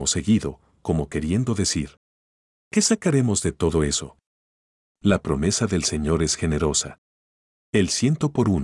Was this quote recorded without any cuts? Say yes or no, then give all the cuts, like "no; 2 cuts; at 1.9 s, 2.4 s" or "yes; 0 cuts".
yes; 0 cuts